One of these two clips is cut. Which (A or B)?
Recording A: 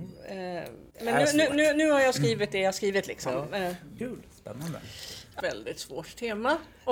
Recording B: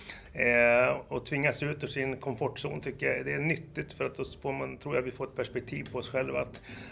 A